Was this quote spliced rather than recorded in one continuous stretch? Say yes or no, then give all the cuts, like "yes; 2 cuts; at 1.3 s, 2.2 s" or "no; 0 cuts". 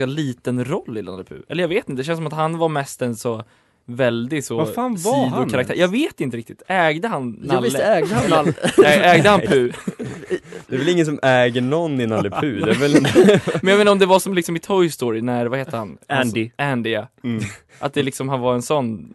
no; 0 cuts